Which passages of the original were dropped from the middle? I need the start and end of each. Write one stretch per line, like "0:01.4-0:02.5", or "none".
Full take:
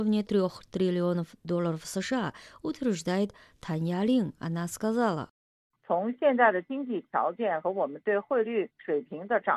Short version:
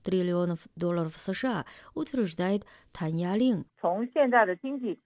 0:04.4-0:05.7